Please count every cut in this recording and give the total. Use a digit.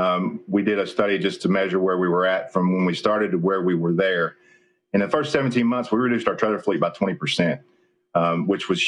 0